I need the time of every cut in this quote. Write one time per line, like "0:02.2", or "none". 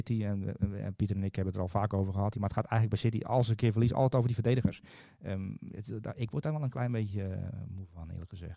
0:02.3